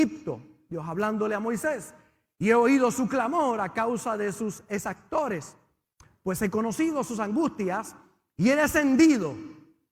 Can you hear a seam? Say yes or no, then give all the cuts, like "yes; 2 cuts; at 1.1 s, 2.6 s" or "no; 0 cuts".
no; 0 cuts